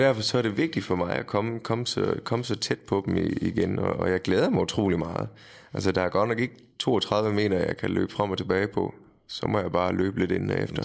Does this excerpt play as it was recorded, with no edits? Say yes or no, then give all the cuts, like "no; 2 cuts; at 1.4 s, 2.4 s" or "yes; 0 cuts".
yes; 0 cuts